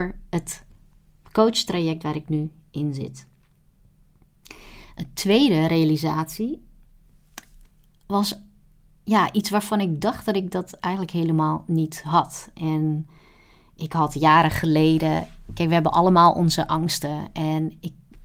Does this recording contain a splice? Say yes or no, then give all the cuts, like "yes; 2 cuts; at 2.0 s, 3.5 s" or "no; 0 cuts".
no; 0 cuts